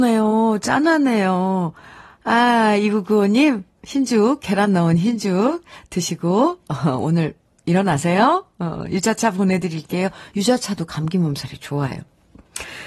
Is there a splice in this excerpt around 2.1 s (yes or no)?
yes